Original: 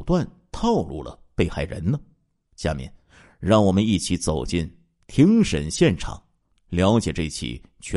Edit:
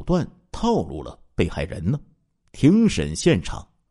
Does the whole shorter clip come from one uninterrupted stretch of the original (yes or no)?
no